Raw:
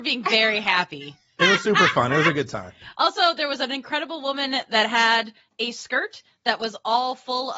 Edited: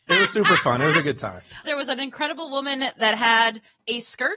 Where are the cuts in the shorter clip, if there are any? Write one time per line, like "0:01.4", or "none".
0:01.6